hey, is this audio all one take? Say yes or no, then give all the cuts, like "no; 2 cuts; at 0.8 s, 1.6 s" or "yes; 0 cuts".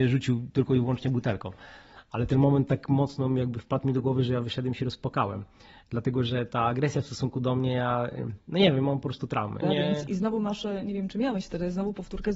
no; 1 cut; at 9.6 s